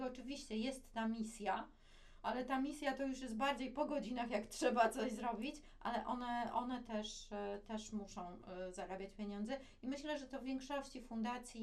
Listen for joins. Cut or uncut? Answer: uncut